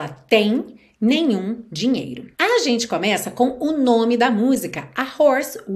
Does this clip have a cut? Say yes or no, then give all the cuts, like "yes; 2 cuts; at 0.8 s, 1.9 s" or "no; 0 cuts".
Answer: yes; 1 cut; at 2.3 s